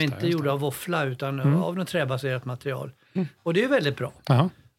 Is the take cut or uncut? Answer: uncut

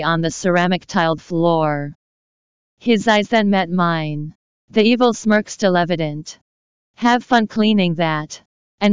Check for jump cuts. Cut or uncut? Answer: uncut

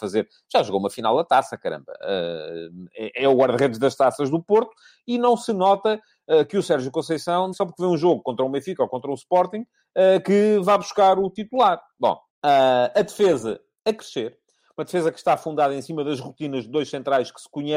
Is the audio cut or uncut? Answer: cut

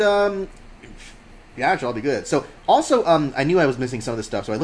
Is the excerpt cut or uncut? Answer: uncut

